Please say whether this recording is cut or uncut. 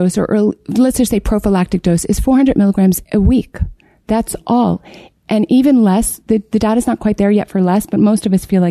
uncut